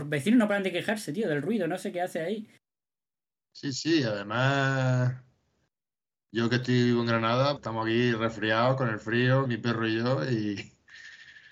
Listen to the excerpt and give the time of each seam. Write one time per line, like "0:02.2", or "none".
0:07.6
0:09.5

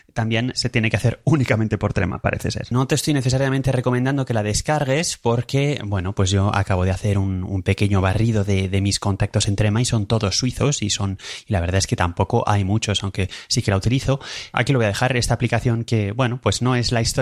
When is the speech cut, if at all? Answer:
0:02.7

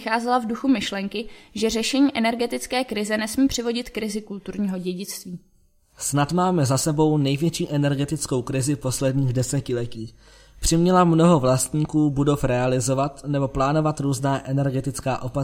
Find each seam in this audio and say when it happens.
none

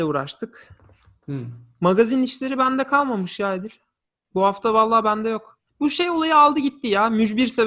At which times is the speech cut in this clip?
0:05.7

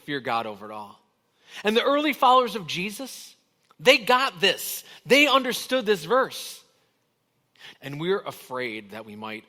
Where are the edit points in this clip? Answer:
0:07.7

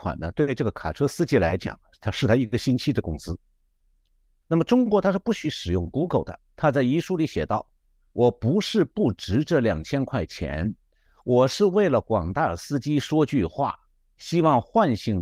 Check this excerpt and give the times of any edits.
0:04.4
0:06.5

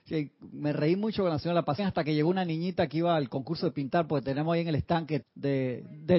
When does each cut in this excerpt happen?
0:01.8
0:05.2

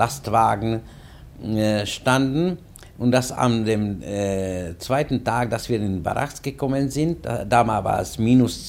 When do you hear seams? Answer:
none

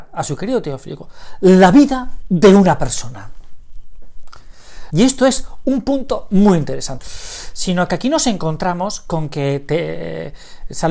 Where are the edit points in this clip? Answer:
0:04.9
0:07.0

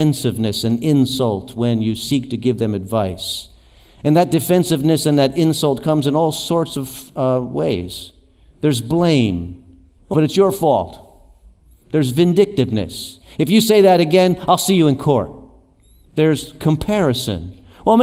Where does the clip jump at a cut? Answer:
0:10.1

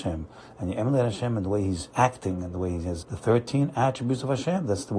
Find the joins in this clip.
0:01.9
0:03.0

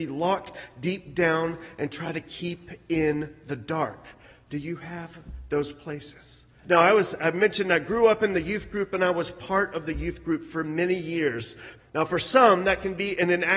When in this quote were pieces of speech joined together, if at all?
0:06.6
0:11.8

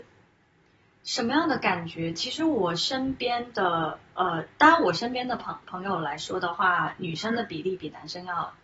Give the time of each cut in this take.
none

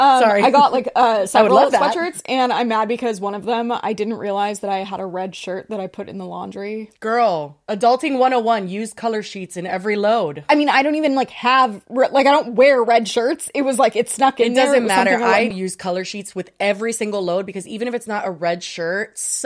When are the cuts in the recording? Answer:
0:15.5

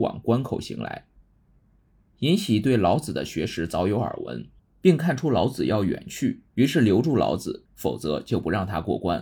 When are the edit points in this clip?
0:04.6
0:06.5
0:07.7

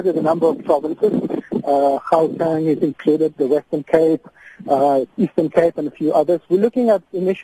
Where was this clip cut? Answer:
none

